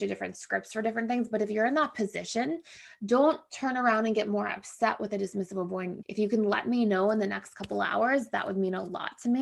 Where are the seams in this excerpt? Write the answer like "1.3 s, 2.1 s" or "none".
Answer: 6.0 s